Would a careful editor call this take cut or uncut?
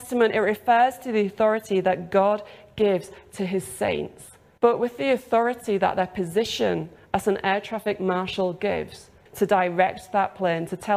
cut